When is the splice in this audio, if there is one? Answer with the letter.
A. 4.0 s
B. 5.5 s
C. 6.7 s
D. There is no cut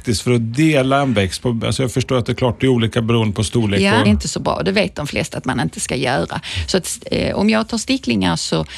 A